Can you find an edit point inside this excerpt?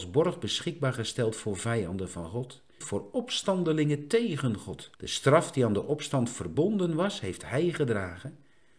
yes; 2 cuts; at 2.8 s, 4.9 s

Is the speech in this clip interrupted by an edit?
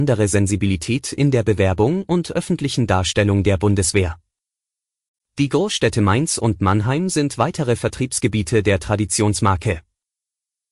yes; 1 cut; at 5.2 s

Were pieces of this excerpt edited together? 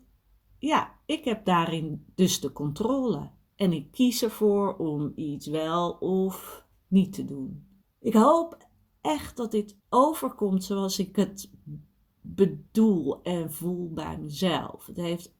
yes; 2 cuts; at 7.8 s, 9.8 s

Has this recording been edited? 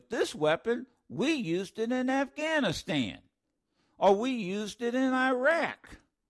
no; 0 cuts

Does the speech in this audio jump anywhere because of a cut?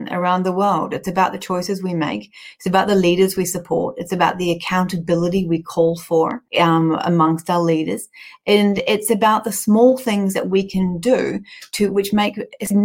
yes; 1 cut; at 6.5 s

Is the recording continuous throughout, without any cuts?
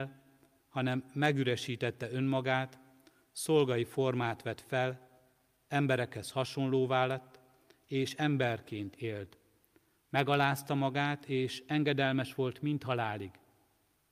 yes; 0 cuts

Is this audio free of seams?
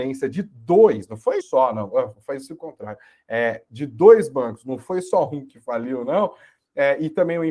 no; 1 cut; at 1.4 s

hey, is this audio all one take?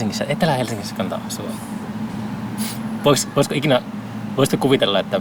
yes; 0 cuts

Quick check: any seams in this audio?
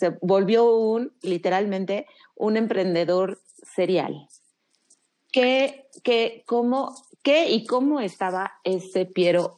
no; 0 cuts

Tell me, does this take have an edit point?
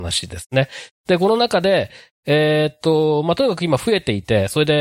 no; 0 cuts

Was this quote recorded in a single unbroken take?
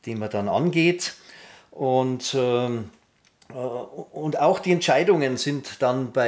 yes; 0 cuts

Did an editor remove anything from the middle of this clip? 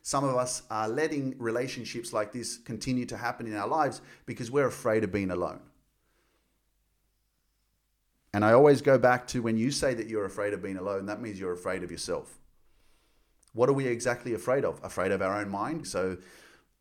yes; 1 cut; at 15.8 s

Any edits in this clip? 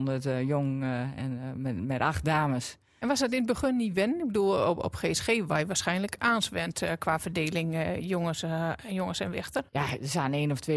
yes; 1 cut; at 9.7 s

